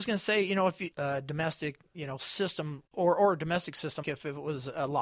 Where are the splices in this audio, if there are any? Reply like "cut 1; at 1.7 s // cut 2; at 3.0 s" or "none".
cut 1; at 0.9 s // cut 2; at 2.9 s // cut 3; at 4.0 s